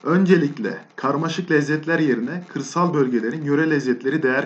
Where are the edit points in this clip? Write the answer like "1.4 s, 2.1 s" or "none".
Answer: none